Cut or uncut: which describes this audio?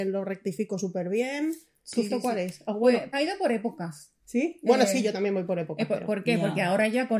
cut